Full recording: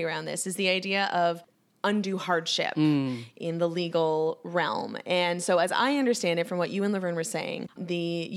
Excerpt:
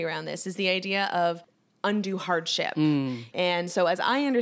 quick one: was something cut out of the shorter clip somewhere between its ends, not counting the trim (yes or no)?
yes